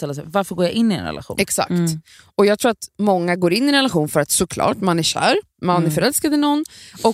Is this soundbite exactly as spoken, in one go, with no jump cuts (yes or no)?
yes